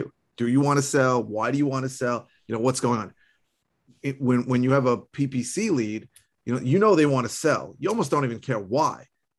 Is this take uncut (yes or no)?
yes